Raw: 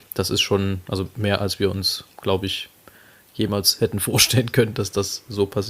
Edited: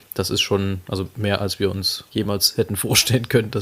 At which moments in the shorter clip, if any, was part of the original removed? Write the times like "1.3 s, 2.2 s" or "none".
2.1 s